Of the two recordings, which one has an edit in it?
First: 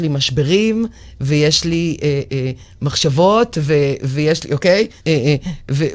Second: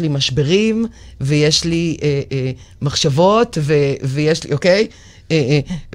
first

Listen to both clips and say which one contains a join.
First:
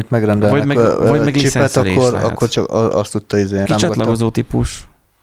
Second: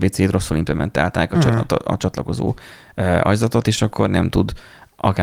first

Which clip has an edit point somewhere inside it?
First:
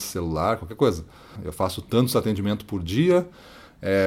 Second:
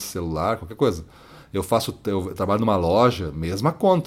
first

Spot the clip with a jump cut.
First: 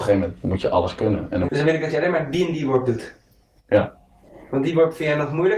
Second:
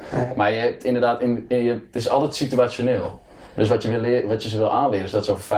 first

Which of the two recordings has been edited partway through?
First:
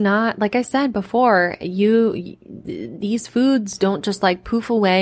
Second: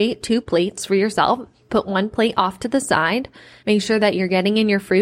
second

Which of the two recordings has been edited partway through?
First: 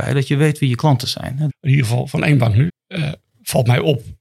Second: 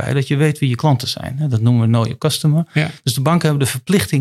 first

